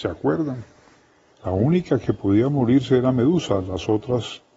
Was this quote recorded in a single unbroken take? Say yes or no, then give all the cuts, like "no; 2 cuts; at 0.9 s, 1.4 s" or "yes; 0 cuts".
no; 1 cut; at 1.3 s